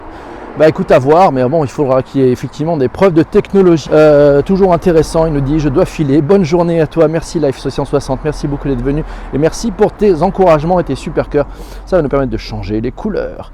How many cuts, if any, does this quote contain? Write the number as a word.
one